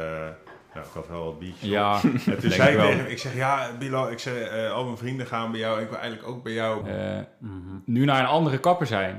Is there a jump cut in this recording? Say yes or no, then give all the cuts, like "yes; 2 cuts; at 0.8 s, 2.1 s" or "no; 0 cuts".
yes; 1 cut; at 6.8 s